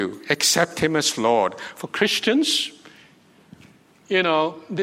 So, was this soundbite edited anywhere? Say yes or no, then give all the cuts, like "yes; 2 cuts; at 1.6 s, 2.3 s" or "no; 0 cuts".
no; 0 cuts